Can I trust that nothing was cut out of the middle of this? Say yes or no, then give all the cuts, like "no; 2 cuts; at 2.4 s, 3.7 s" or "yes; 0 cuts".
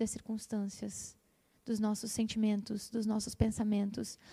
yes; 0 cuts